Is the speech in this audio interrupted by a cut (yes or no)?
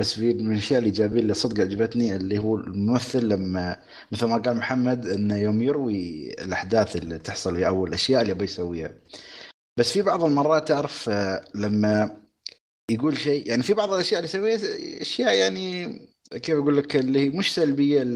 no